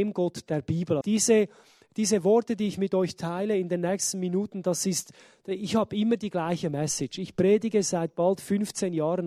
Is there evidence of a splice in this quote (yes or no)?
yes